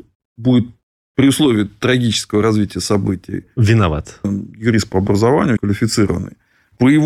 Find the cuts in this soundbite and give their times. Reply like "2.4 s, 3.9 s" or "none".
4.2 s, 5.6 s